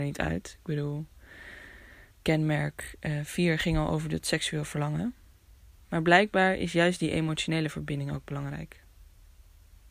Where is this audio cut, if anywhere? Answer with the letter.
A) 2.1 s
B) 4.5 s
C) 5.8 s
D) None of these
A